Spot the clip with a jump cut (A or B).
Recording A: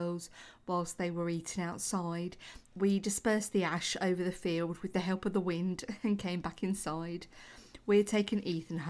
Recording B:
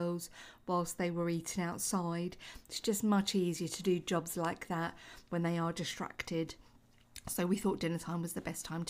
A